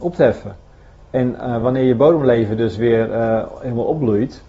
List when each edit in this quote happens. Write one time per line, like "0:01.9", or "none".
none